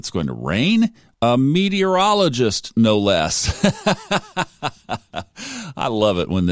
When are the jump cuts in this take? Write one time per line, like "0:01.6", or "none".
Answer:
0:01.1